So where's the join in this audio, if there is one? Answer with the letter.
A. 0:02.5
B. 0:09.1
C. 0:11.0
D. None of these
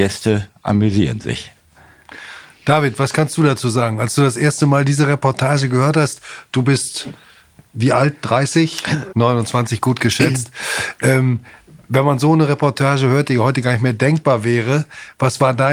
B